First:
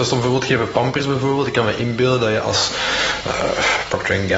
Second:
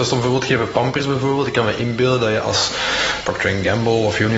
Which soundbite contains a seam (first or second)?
second